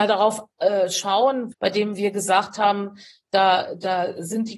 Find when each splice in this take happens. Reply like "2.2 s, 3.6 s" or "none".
1.5 s